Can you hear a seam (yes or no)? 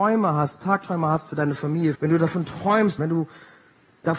yes